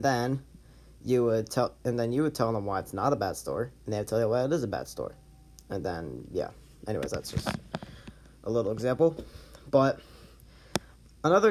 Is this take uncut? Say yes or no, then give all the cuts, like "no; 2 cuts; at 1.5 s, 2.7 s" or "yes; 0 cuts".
yes; 0 cuts